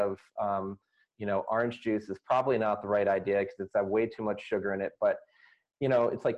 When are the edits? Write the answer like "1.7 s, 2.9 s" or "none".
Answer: none